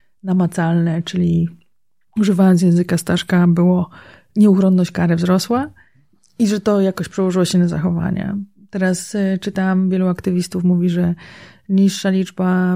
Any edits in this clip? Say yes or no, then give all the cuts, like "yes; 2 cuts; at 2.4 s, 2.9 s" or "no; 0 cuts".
no; 0 cuts